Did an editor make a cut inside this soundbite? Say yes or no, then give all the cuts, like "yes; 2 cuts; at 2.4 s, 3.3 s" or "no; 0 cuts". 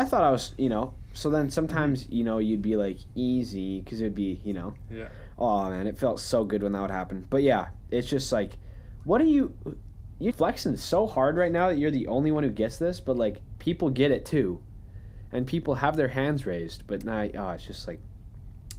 yes; 1 cut; at 10.3 s